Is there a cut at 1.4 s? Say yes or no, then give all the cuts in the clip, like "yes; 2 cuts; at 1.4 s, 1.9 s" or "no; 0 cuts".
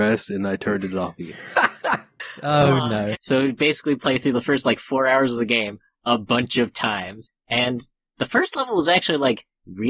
no; 1 cut; at 3.1 s